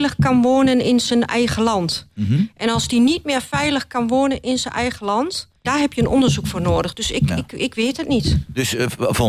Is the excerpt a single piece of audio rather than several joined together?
no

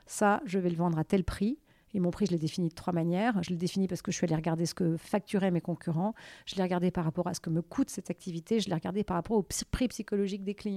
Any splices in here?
no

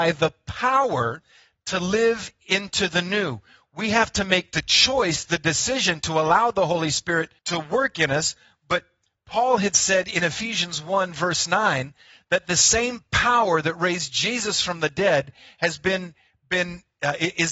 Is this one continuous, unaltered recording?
no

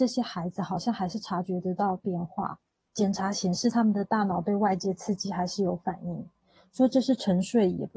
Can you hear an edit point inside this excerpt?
no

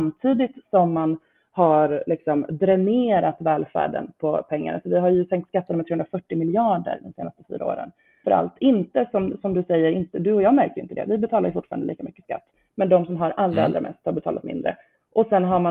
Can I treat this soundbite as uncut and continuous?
no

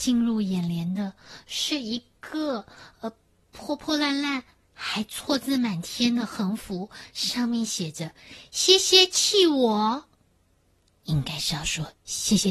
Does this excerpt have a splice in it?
no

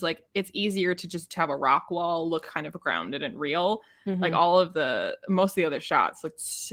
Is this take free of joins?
yes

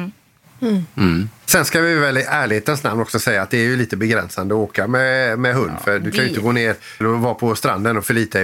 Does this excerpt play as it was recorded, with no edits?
no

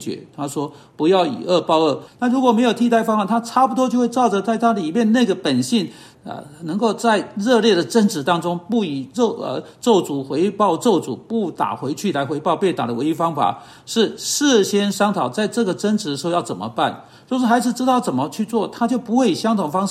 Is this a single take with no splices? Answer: no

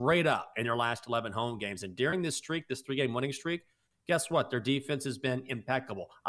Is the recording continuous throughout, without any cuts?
yes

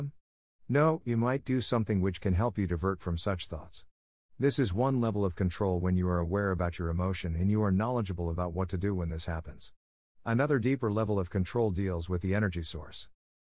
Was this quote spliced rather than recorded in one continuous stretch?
no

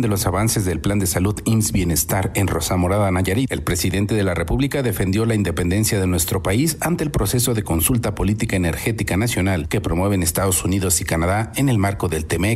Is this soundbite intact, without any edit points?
yes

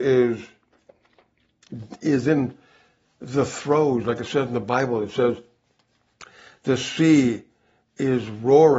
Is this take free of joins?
yes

